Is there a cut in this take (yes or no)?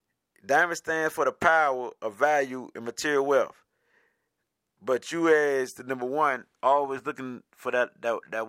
no